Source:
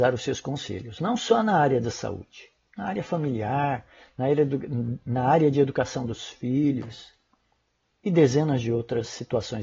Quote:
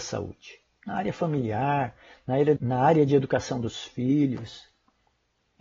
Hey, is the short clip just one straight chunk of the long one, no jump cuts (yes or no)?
no